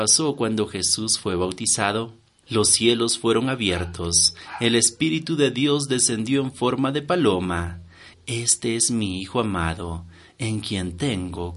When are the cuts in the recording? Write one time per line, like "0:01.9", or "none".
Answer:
0:08.1